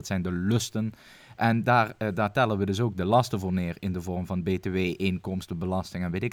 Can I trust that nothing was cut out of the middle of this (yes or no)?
yes